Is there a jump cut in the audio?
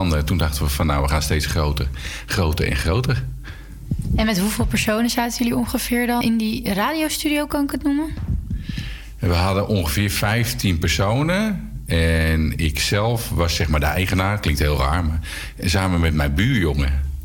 yes; 1 cut; at 6.2 s

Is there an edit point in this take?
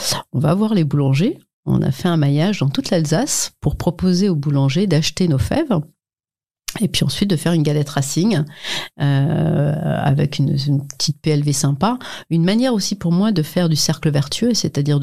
no; 0 cuts

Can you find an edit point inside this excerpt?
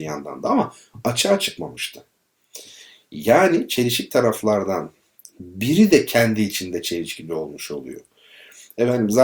no; 0 cuts

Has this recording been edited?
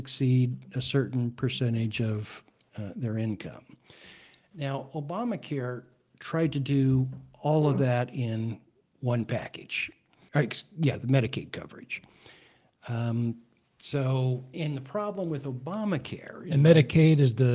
yes; 2 cuts; at 10.3 s, 14.5 s

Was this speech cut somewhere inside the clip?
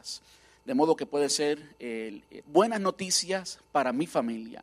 yes; 1 cut; at 2.4 s

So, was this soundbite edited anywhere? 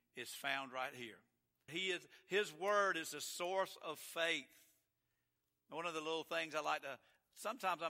yes; 1 cut; at 1.7 s

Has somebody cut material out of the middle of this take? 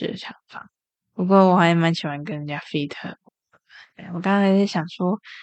no; 0 cuts

